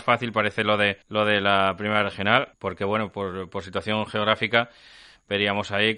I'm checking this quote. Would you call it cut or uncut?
cut